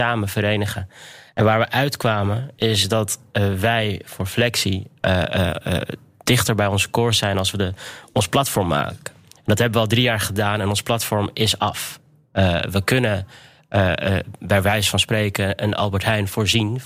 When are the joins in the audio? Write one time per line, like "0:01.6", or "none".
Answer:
none